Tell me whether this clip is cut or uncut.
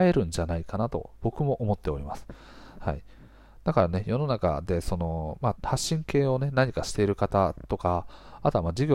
cut